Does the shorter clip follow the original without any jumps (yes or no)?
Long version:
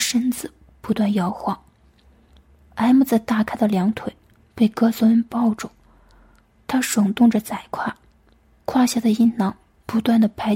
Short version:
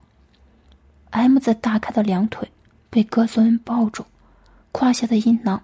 no